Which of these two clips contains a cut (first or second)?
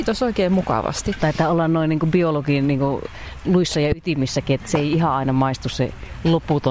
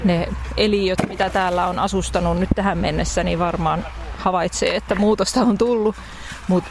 first